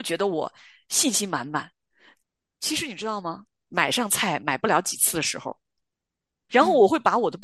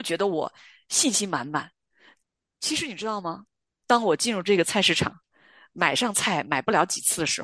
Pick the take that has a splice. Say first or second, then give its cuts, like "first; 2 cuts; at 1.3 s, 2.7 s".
first; 2 cuts; at 3.7 s, 6.5 s